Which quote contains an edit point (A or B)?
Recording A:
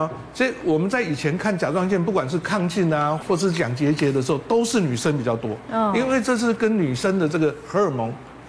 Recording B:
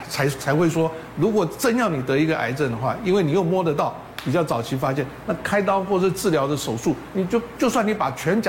A